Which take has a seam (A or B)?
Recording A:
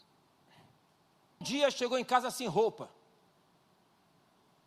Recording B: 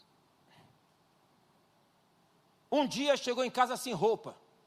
A